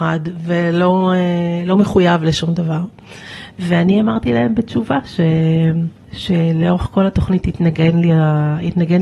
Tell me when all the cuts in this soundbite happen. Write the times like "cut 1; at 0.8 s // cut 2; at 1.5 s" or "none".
none